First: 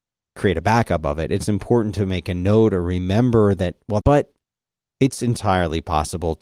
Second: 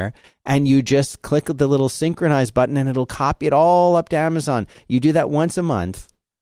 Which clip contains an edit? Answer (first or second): first